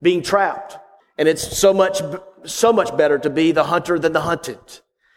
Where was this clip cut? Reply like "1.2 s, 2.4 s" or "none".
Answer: 1.0 s